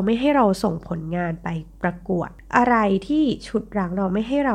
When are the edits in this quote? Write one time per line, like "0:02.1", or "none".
none